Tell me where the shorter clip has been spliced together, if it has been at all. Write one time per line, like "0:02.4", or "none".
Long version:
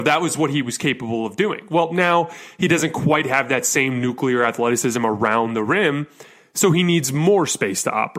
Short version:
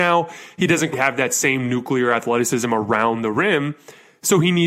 0:00.9